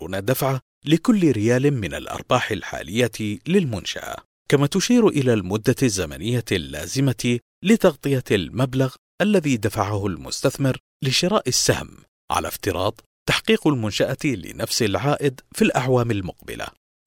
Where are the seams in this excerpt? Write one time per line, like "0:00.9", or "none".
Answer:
none